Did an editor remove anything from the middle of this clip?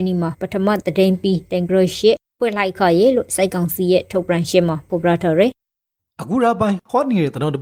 no; 0 cuts

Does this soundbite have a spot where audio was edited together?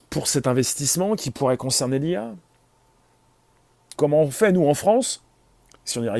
yes; 1 cut; at 3.9 s

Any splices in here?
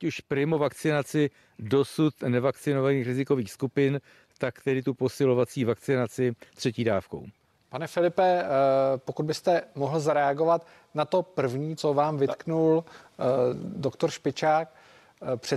yes; 1 cut; at 11.8 s

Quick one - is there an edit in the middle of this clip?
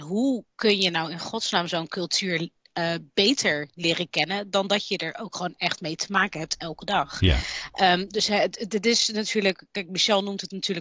no; 0 cuts

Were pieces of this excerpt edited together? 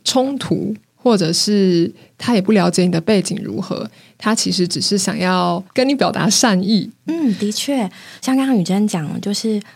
yes; 3 cuts; at 5.7 s, 7.1 s, 8.2 s

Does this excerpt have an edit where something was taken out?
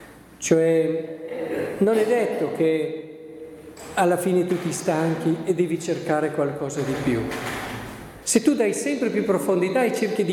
yes; 1 cut; at 8.2 s

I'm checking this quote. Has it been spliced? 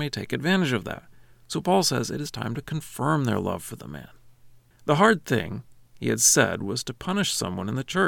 yes; 1 cut; at 4.7 s

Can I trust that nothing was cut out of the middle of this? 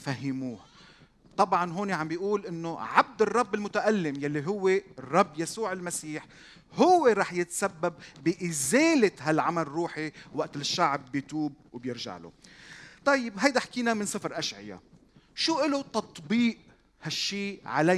yes; 0 cuts

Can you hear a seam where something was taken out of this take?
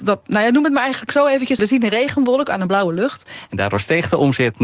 yes; 2 cuts; at 1.6 s, 3.5 s

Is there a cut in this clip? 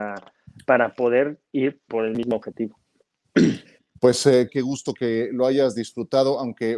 yes; 2 cuts; at 1.9 s, 4.5 s

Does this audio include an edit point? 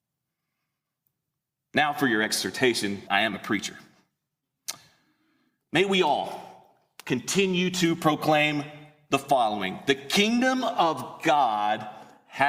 yes; 1 cut; at 3.1 s

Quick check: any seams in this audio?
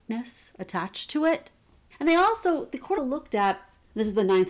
yes; 2 cuts; at 1.9 s, 3.0 s

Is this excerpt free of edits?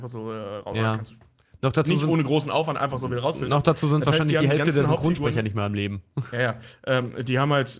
yes; 0 cuts

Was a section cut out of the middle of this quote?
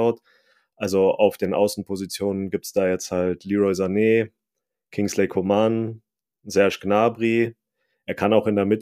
no; 0 cuts

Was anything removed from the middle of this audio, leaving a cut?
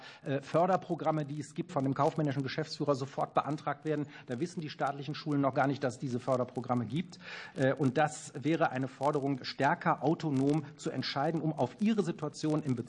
yes; 2 cuts; at 1.7 s, 9.4 s

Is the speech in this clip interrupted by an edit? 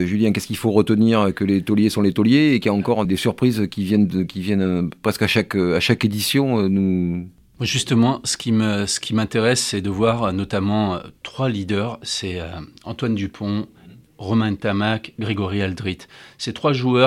yes; 1 cut; at 3.0 s

